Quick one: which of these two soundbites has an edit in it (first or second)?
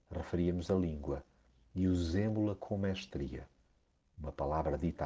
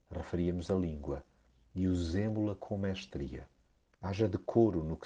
second